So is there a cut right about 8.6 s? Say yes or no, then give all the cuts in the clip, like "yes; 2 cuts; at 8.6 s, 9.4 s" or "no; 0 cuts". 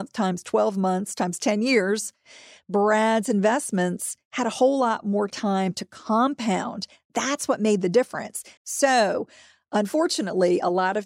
yes; 1 cut; at 8.6 s